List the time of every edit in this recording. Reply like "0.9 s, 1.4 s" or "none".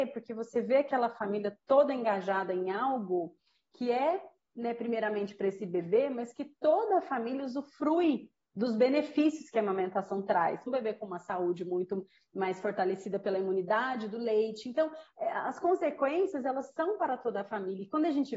10.7 s

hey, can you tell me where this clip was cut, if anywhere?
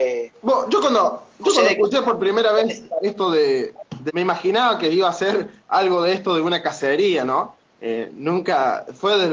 4.1 s

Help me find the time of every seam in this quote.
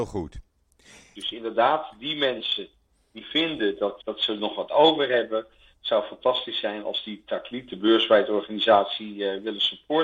1.2 s, 4.0 s

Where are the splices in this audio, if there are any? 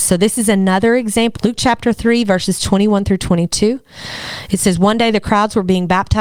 1.4 s

